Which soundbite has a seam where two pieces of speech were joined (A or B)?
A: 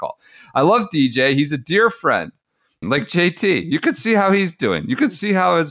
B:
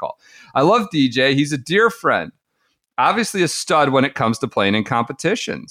A